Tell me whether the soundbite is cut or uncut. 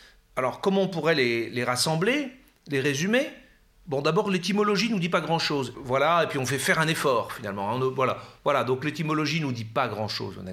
cut